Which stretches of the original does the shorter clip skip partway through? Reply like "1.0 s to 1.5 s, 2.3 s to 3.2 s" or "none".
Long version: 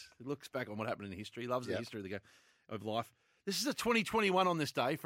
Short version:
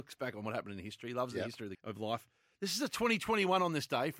2.1 s to 2.6 s